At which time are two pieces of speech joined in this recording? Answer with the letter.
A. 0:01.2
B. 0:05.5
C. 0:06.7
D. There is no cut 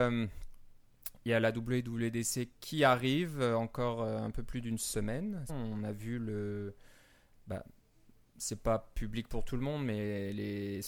B